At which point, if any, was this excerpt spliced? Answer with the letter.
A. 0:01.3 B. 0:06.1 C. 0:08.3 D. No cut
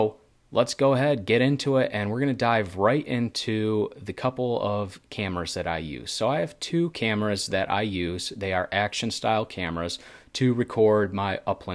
D